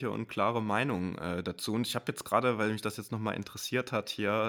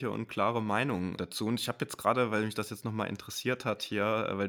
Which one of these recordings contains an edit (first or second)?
second